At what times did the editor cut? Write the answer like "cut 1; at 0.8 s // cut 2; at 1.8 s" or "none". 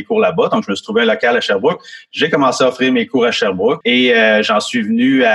cut 1; at 3.8 s